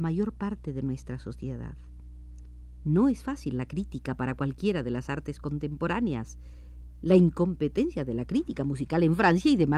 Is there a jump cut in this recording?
yes; 2 cuts; at 2.8 s, 7.0 s

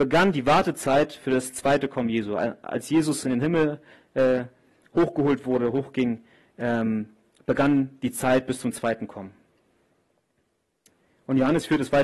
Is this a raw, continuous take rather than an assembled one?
yes; 0 cuts

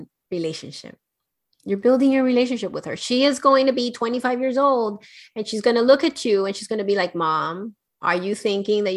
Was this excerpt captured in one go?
yes; 0 cuts

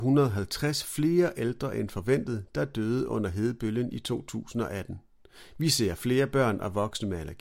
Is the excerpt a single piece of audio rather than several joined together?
yes; 0 cuts

